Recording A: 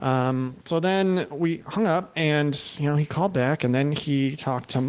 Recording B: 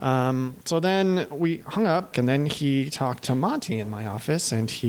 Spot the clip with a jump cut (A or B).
B